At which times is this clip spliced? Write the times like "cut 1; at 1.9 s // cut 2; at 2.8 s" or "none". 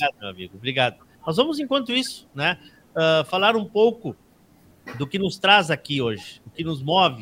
cut 1; at 1.1 s